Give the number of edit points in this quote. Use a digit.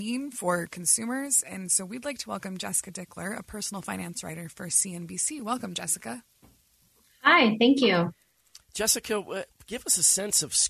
0